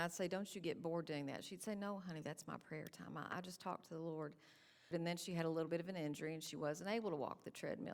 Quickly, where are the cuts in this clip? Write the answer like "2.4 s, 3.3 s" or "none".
4.9 s